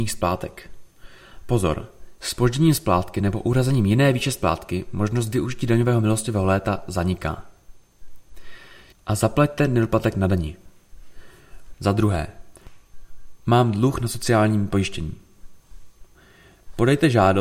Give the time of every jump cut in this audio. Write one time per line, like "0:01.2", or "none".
0:08.9
0:11.7